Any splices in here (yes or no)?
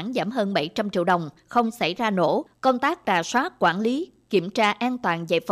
yes